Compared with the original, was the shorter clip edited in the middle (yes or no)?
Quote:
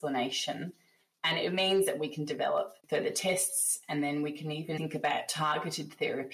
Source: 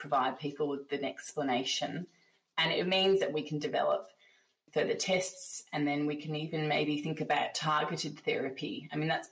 yes